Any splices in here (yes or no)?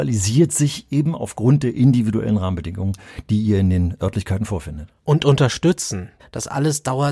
yes